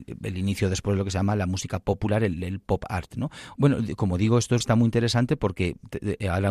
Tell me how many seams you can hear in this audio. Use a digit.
2